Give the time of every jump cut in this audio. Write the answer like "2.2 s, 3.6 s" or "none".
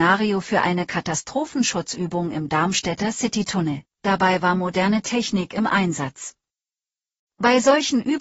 3.9 s